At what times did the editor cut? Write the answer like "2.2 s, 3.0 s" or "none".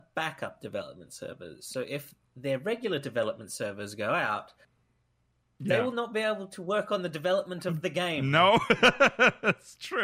none